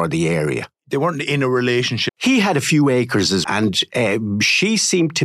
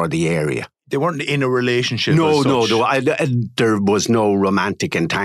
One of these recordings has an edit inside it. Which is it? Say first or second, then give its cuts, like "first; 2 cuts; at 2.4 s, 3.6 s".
first; 2 cuts; at 2.1 s, 3.4 s